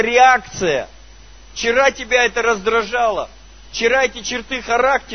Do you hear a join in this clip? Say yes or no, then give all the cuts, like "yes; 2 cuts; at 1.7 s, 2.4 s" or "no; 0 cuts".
no; 0 cuts